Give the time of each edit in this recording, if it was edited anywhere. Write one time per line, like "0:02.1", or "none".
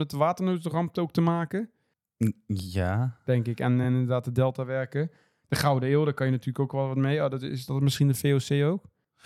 none